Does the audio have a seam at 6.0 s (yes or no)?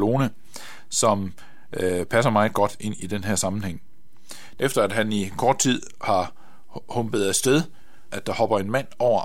no